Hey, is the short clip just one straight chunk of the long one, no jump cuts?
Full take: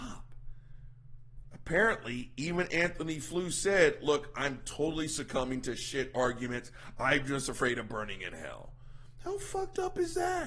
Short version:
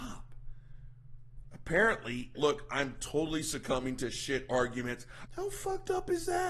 no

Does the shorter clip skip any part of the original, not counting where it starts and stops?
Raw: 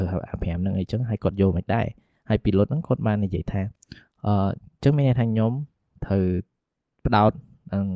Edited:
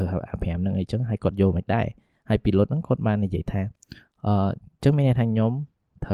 no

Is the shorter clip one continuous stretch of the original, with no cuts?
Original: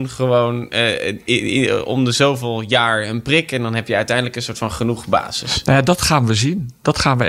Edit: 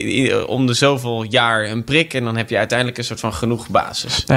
yes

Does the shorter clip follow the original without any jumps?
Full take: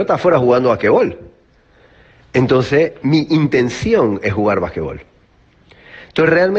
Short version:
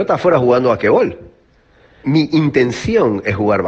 no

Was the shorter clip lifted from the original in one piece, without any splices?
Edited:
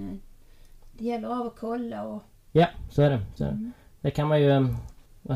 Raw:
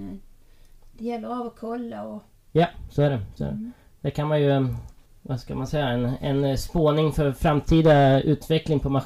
yes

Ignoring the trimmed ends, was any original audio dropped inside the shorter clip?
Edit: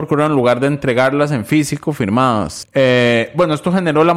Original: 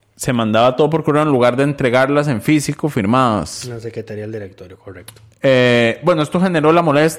yes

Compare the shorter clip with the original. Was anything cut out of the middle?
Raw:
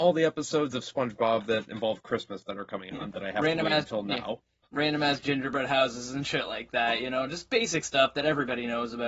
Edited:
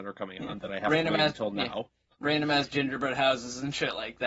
no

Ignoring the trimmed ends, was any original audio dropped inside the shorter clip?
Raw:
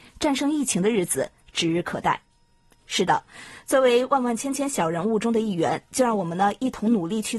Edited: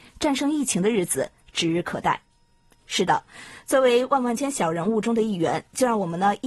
yes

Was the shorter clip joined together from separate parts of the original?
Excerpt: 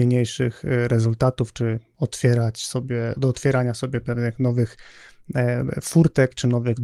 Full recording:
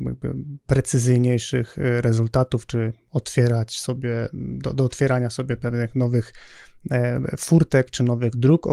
yes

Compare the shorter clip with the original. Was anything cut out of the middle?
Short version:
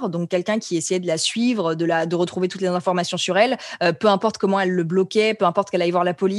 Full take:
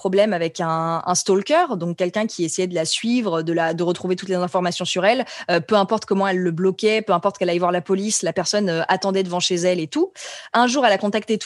no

